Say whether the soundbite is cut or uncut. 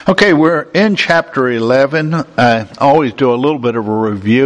uncut